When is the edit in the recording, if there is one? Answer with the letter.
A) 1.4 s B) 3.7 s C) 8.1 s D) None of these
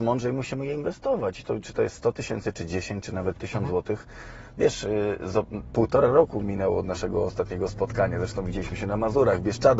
D